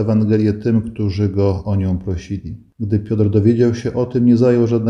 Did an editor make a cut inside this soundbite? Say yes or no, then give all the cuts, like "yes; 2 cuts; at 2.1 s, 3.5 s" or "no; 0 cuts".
no; 0 cuts